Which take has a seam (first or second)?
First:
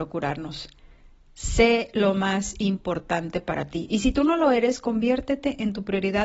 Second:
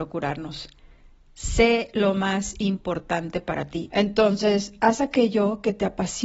second